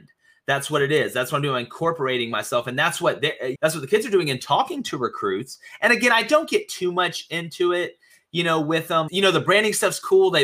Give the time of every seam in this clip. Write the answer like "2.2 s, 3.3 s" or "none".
3.5 s, 9.1 s